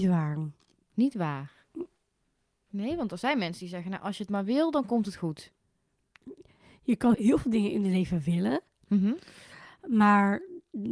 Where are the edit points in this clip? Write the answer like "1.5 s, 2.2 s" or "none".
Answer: 7.1 s